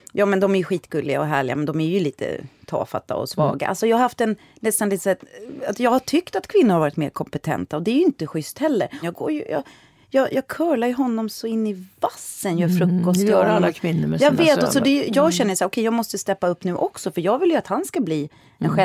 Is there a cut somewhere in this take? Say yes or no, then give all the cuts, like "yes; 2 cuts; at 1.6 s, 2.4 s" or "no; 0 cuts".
yes; 1 cut; at 9.0 s